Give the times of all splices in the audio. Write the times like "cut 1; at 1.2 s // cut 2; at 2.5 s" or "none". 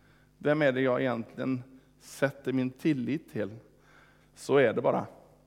cut 1; at 4.2 s